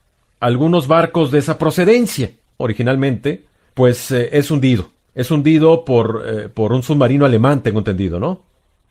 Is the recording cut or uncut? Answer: cut